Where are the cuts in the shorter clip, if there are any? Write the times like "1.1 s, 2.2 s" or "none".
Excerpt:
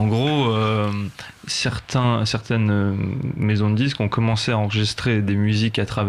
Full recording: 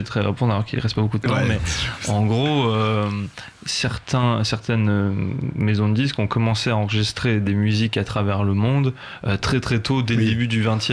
none